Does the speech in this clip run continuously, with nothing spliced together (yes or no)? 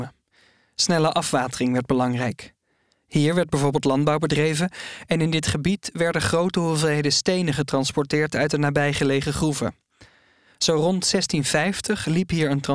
yes